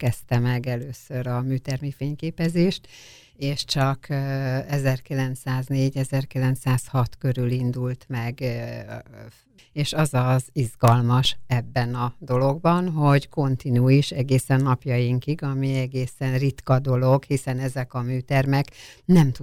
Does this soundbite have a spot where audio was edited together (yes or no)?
yes